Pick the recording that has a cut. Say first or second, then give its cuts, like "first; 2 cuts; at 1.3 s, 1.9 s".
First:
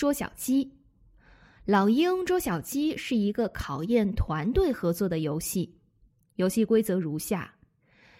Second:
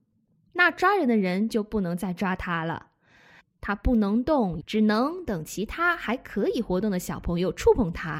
second; 2 cuts; at 3.4 s, 4.6 s